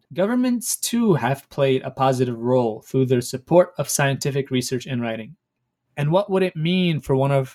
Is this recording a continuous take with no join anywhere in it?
no; 1 cut; at 5.8 s

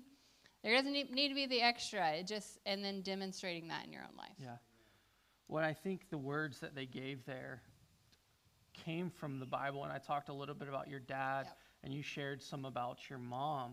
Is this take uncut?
yes; 0 cuts

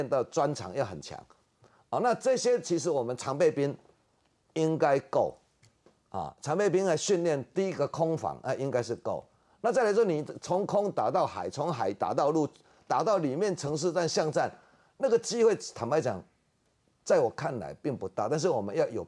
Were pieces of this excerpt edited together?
no; 0 cuts

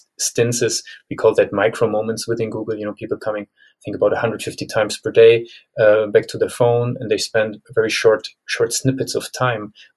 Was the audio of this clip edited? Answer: no; 0 cuts

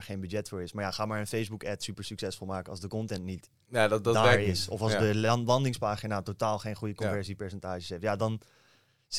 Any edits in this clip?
no; 0 cuts

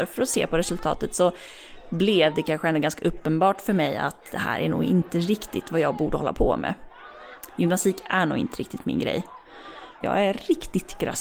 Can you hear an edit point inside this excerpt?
yes; 1 cut; at 10.0 s

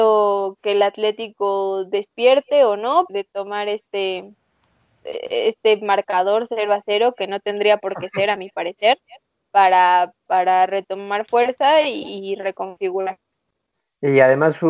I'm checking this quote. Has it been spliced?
yes; 1 cut; at 3.1 s

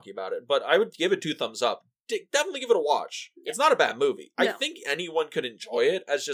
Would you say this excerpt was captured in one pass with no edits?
yes; 0 cuts

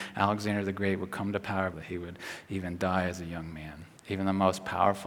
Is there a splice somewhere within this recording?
yes; 2 cuts; at 1.7 s, 4.0 s

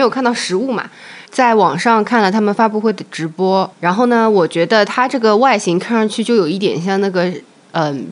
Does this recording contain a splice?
yes; 2 cuts; at 1.3 s, 3.7 s

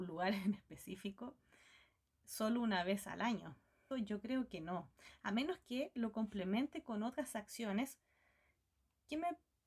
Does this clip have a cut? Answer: yes; 1 cut; at 3.9 s

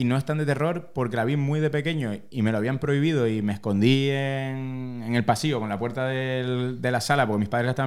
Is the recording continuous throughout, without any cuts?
yes; 0 cuts

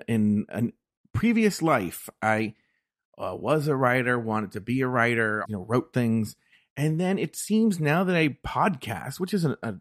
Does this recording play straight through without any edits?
no; 1 cut; at 5.5 s

